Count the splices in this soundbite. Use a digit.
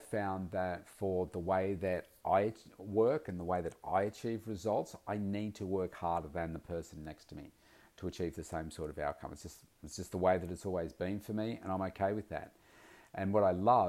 0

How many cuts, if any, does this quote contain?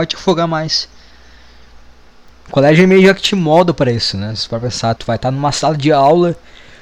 2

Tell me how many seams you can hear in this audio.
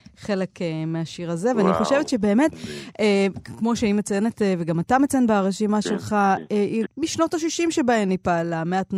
1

